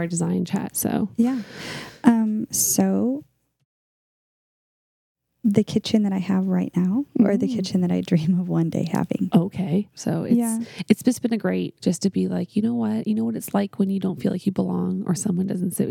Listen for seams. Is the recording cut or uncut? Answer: cut